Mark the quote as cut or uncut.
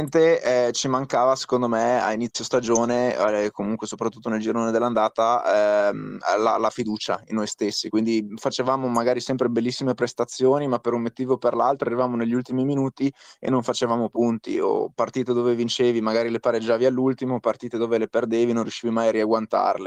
uncut